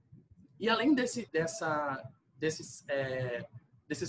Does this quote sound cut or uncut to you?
cut